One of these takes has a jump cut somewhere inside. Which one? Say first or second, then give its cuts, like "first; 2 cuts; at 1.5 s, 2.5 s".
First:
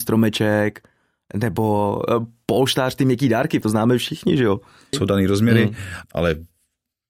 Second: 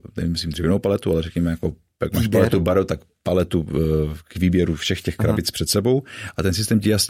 first; 3 cuts; at 3.6 s, 4.9 s, 6.0 s